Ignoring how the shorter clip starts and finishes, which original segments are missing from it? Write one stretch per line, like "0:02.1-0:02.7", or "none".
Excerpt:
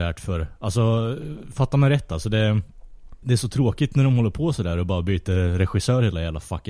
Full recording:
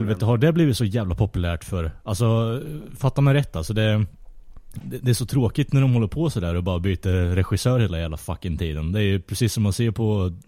0:04.7-0:05.0